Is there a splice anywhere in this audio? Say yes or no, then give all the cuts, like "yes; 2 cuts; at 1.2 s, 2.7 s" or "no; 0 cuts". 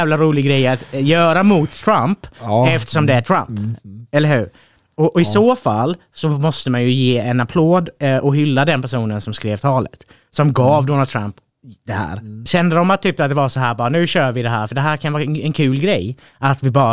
yes; 1 cut; at 12.5 s